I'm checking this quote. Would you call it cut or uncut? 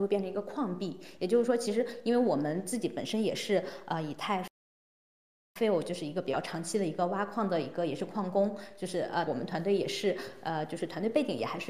cut